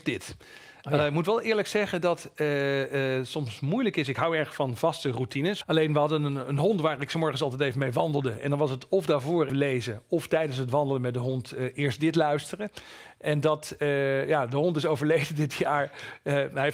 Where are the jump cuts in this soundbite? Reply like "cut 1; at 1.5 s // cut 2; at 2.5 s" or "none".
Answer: cut 1; at 9.5 s